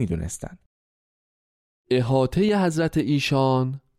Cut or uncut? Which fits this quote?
cut